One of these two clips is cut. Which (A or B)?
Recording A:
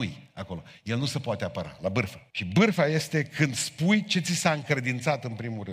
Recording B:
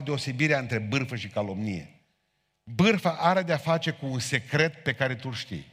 A